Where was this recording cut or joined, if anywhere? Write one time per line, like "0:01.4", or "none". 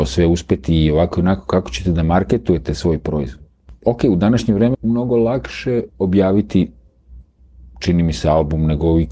0:04.7
0:05.9